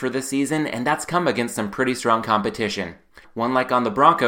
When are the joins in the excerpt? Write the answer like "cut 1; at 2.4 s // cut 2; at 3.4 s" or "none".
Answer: cut 1; at 3.2 s